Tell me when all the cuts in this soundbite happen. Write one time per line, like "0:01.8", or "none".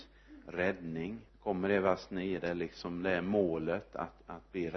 0:01.3